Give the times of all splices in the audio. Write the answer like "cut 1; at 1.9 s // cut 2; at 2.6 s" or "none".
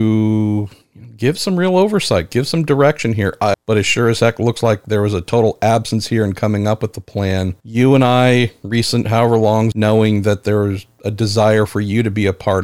cut 1; at 3.5 s // cut 2; at 9.7 s